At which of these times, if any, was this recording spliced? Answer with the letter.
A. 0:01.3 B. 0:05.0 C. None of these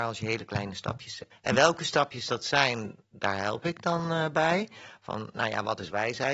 A